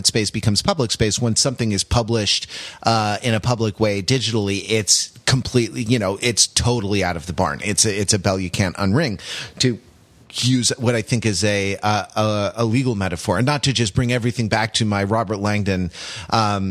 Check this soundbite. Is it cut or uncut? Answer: uncut